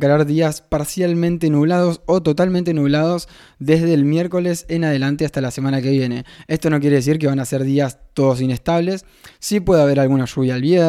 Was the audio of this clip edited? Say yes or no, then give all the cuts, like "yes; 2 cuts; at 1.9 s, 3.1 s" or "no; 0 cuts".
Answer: no; 0 cuts